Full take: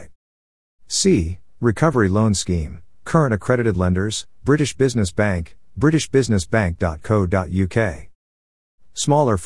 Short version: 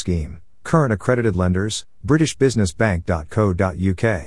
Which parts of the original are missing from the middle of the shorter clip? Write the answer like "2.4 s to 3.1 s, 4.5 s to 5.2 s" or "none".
4.4 s to 5.7 s